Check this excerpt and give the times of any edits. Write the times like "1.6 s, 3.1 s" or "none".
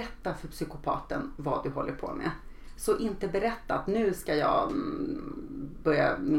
none